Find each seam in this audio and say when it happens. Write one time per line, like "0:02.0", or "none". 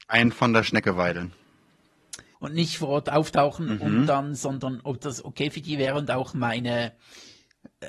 0:02.3